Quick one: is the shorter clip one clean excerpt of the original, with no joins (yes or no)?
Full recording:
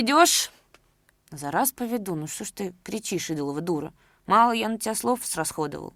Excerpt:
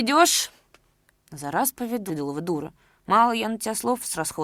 no